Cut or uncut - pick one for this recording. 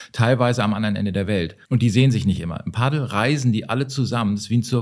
cut